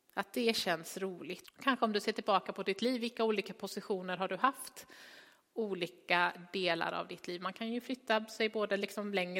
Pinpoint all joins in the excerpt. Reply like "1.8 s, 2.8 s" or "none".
1.4 s